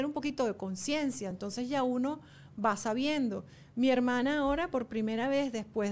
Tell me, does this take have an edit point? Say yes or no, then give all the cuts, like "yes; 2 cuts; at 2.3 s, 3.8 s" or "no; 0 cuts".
no; 0 cuts